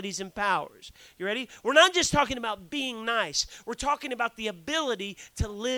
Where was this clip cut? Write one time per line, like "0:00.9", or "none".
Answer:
none

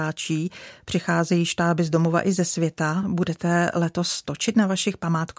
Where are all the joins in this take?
none

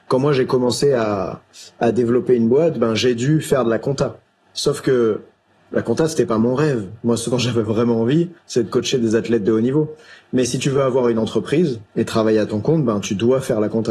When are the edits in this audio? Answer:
0:11.9

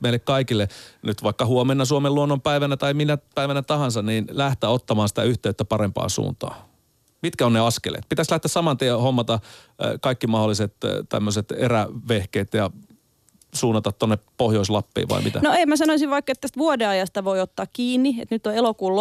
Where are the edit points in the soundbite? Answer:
none

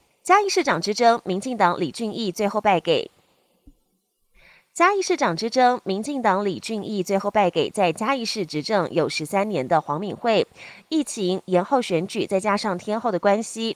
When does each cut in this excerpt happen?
none

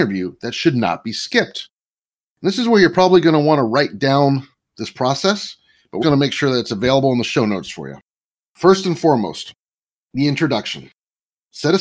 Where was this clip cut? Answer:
0:06.0

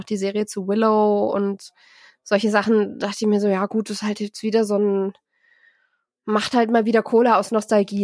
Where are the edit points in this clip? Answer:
none

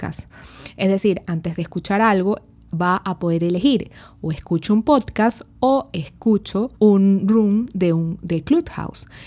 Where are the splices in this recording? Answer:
0:01.2
0:06.7

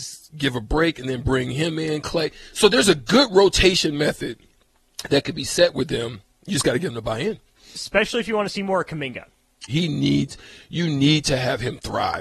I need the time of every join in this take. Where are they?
0:09.7

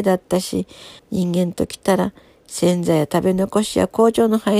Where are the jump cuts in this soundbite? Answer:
0:01.0

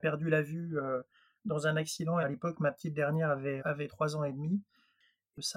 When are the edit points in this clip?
0:02.2
0:03.6

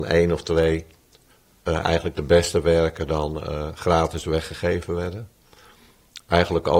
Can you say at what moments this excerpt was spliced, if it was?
none

